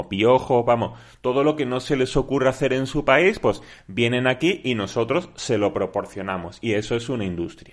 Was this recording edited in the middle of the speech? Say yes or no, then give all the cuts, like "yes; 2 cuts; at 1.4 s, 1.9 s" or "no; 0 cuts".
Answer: no; 0 cuts